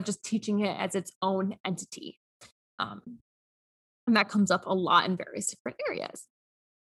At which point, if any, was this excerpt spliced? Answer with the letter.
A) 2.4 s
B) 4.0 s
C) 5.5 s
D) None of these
D